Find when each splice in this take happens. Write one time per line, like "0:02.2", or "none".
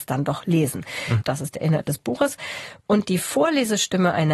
0:01.2